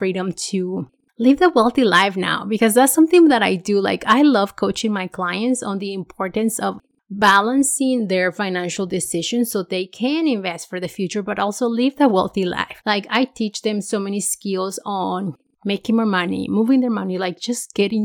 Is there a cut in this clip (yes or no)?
yes